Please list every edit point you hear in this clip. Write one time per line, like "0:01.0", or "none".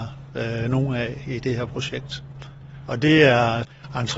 0:02.9